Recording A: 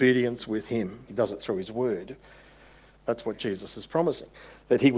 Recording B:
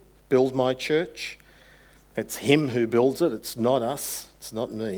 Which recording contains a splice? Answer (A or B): A